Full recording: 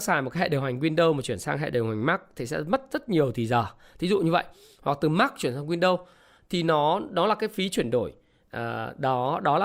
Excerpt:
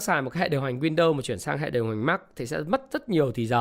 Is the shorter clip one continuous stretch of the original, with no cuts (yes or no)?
yes